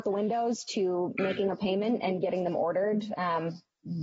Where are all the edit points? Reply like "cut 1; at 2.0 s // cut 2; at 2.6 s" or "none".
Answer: none